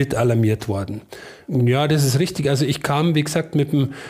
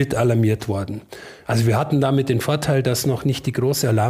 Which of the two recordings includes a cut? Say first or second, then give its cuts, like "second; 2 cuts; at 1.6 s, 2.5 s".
first; 1 cut; at 1.5 s